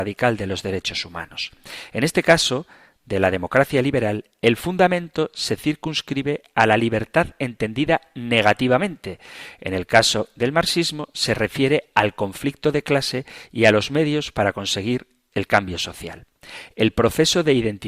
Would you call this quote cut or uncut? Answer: uncut